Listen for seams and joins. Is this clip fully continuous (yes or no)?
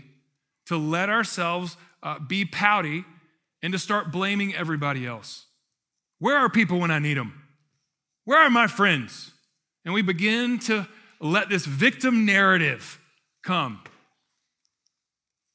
yes